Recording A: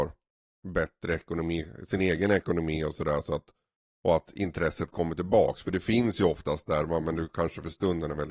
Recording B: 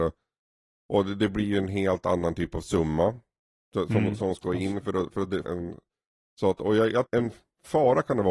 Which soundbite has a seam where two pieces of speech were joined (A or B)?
B